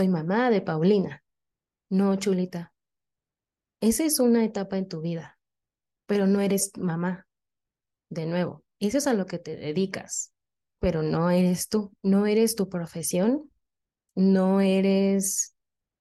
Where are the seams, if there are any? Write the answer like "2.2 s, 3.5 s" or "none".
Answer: 7.9 s, 12.0 s